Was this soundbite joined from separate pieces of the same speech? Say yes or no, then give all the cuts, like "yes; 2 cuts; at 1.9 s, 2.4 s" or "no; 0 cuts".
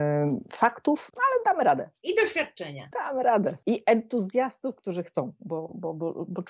no; 0 cuts